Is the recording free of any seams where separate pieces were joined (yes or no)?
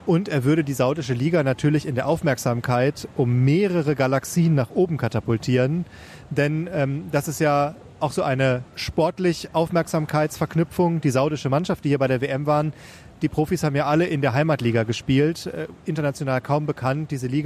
yes